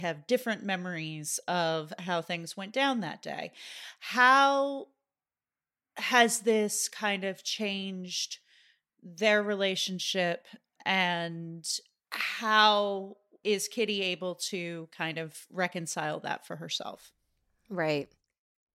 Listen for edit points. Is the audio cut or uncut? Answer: uncut